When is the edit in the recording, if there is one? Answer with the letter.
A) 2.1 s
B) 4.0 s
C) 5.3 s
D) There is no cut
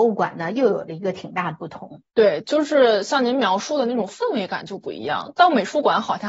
A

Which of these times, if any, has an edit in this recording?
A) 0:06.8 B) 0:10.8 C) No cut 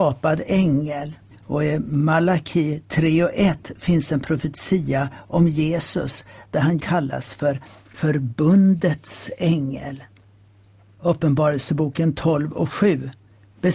A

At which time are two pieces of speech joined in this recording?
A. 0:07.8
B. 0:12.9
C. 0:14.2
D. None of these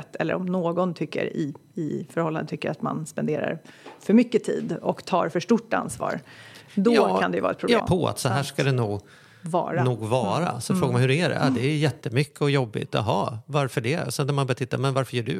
A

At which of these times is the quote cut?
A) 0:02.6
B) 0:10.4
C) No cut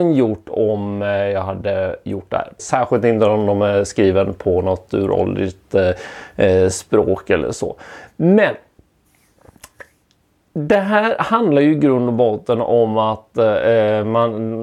A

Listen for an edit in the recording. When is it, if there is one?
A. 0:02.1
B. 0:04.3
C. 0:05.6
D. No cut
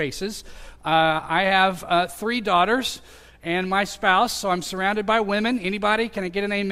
D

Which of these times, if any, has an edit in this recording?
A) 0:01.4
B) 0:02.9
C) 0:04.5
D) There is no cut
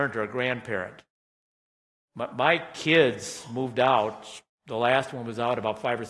D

